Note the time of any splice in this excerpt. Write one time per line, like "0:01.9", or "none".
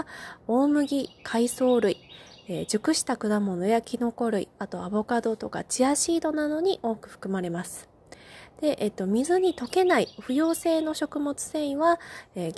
none

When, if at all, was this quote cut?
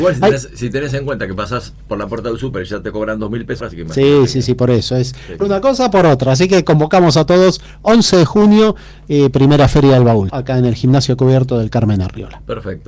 0:03.6
0:05.4
0:10.3

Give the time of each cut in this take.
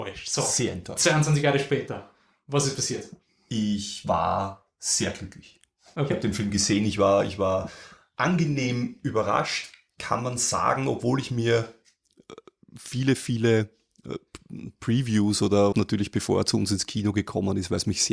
0:15.7

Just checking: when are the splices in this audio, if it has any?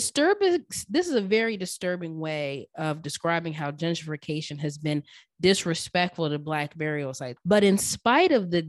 0:07.4

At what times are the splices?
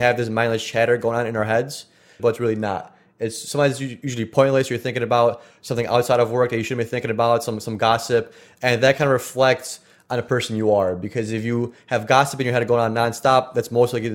0:02.2

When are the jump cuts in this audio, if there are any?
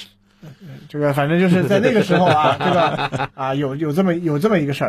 0:03.3

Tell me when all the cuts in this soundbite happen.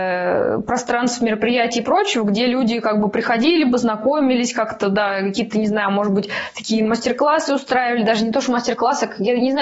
none

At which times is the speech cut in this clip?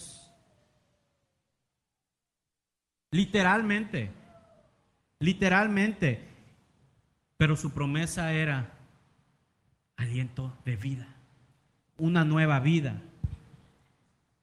0:11.8

